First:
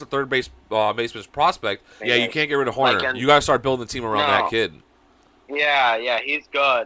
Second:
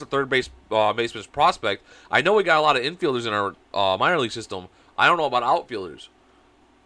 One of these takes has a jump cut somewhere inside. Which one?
first; 1 cut; at 2.0 s

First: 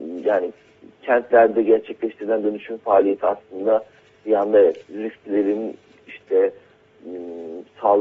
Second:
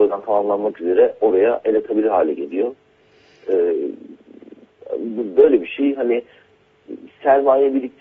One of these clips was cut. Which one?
first; 1 cut; at 4.8 s

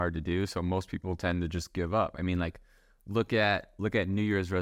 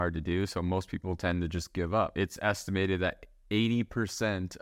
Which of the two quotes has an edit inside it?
second; 1 cut; at 2.1 s

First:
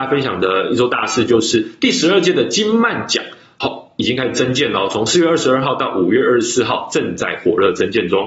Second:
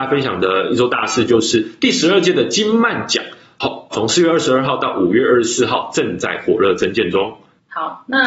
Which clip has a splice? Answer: second; 1 cut; at 3.9 s

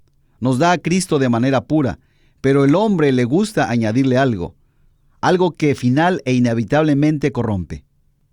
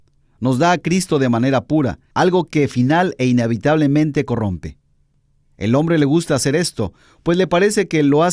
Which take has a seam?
second; 1 cut; at 2.1 s

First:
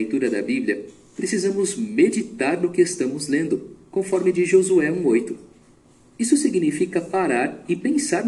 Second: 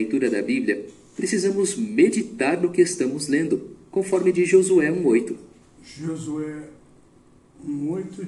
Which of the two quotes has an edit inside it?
second; 1 cut; at 5.6 s

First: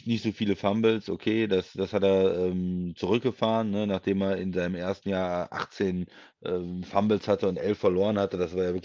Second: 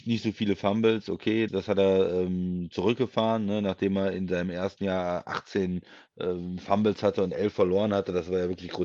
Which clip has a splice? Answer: second; 1 cut; at 1.5 s

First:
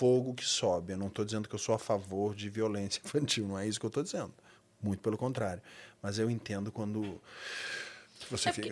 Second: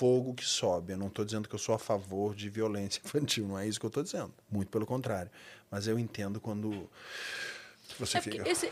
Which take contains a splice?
second; 1 cut; at 4.4 s

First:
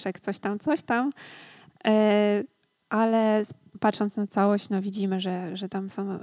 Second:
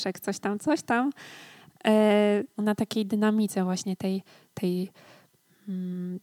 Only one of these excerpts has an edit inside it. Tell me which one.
second; 2 cuts; at 2.6 s, 4.5 s

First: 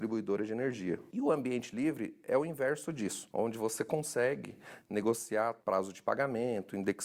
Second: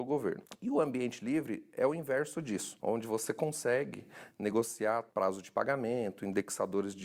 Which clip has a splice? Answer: first; 1 cut; at 1.1 s

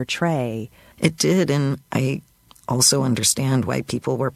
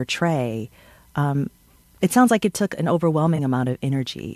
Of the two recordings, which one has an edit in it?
first; 1 cut; at 0.9 s

